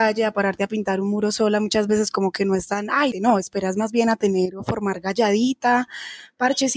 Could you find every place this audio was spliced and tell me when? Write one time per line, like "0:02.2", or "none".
0:03.1